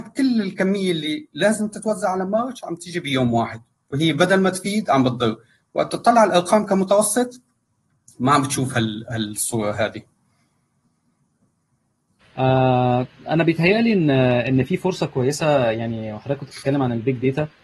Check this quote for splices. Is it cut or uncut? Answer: uncut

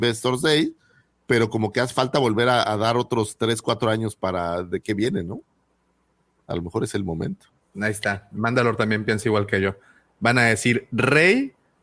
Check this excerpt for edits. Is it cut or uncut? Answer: uncut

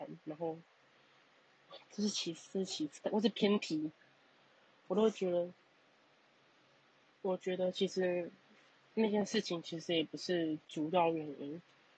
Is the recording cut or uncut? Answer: cut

